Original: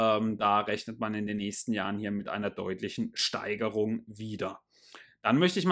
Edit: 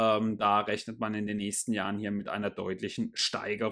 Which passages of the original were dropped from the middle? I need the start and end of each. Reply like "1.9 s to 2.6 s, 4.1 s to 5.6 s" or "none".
none